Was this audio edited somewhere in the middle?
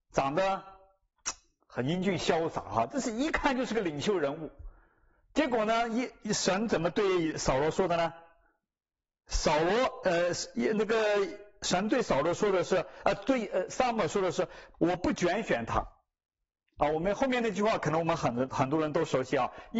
yes; 1 cut; at 14.7 s

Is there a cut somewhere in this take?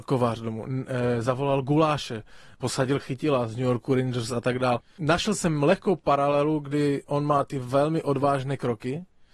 no; 0 cuts

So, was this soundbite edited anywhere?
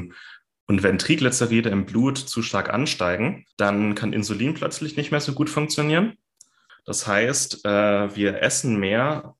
yes; 2 cuts; at 3.5 s, 6.7 s

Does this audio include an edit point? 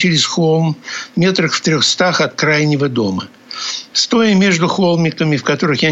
yes; 1 cut; at 3.9 s

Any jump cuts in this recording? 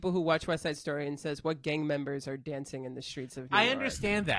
no; 0 cuts

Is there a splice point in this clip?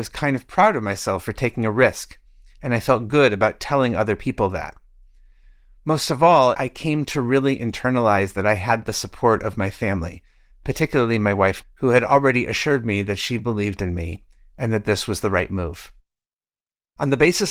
yes; 2 cuts; at 6.5 s, 11.6 s

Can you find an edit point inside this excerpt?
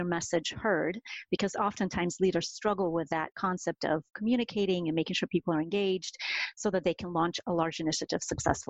no; 0 cuts

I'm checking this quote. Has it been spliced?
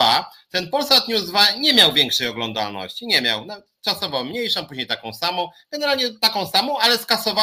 no; 0 cuts

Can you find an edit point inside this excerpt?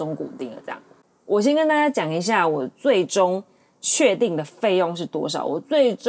no; 0 cuts

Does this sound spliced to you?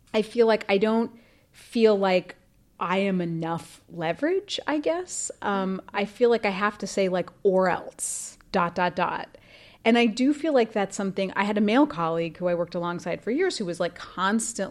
no; 0 cuts

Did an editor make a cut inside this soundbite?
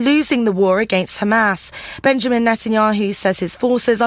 no; 0 cuts

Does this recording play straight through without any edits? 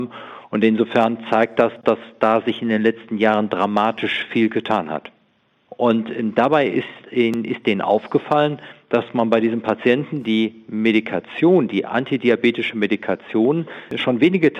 no; 1 cut; at 5.7 s

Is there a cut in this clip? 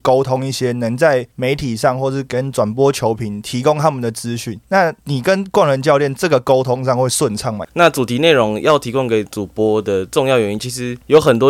yes; 2 cuts; at 7.6 s, 10.6 s

